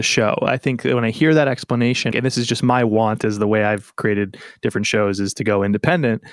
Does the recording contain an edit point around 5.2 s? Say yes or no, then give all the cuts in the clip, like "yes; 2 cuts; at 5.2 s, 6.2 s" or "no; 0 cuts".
no; 1 cut; at 2.1 s